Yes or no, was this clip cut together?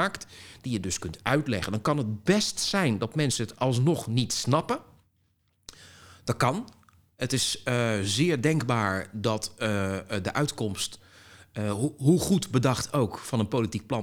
no